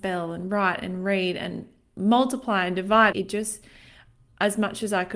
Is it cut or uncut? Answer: cut